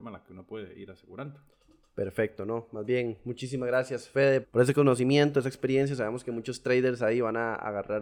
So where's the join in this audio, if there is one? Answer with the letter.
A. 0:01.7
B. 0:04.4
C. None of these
B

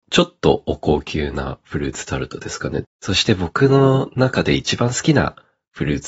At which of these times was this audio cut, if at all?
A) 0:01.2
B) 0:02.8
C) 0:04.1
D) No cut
B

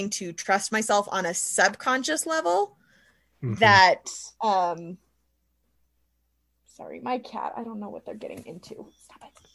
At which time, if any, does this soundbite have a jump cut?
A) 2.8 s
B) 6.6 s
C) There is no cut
C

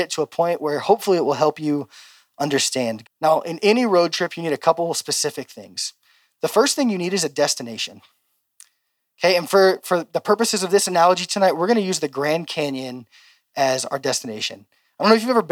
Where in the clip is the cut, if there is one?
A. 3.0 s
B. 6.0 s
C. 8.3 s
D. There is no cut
A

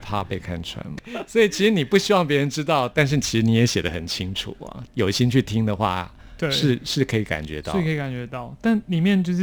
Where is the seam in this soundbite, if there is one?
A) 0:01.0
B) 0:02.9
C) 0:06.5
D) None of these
A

